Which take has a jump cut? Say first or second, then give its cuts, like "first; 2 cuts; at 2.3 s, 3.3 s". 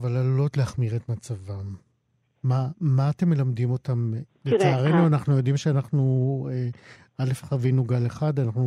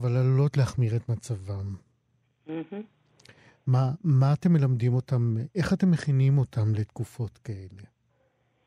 first; 2 cuts; at 2.3 s, 4.3 s